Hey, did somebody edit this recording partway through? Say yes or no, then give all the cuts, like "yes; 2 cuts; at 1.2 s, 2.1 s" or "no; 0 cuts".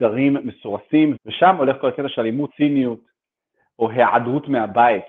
yes; 2 cuts; at 1.2 s, 2.5 s